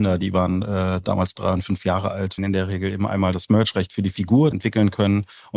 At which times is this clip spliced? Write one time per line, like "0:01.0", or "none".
0:02.4
0:04.5